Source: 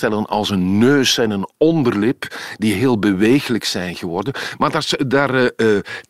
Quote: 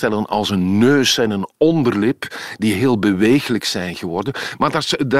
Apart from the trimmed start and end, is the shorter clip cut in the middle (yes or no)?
no